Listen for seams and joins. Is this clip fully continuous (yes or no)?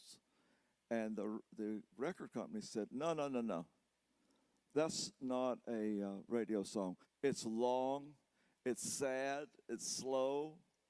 no